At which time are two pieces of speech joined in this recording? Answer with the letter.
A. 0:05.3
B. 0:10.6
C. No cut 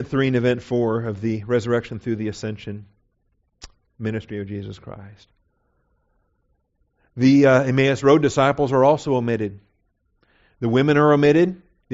C